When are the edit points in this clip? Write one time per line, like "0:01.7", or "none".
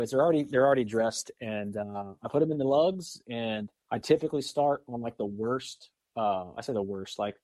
0:03.8